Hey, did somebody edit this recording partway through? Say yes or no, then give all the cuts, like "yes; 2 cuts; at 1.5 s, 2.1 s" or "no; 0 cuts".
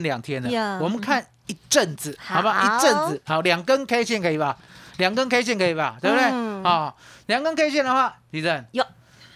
no; 0 cuts